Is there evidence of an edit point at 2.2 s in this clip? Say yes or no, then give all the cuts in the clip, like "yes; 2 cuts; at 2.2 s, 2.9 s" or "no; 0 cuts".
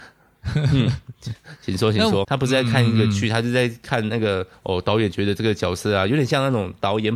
yes; 1 cut; at 2.2 s